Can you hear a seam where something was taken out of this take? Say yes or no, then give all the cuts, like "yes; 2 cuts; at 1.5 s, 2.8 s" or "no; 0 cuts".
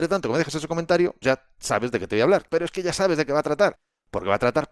yes; 2 cuts; at 1.2 s, 2.5 s